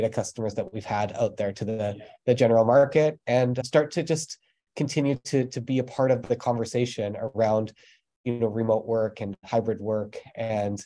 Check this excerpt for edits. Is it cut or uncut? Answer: cut